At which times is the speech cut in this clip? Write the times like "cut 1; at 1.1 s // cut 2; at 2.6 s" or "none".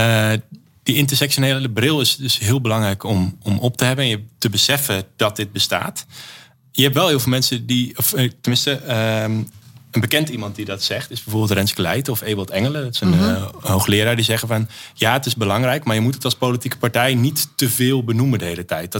none